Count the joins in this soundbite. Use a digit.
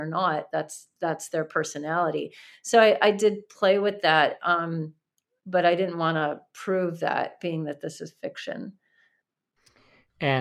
0